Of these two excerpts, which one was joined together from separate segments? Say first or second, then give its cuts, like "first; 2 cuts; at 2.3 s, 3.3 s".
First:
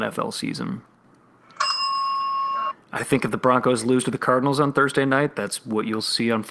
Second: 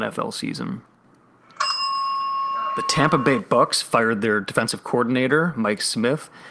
first; 1 cut; at 2.7 s